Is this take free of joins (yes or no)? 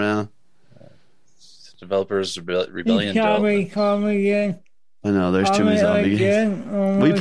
no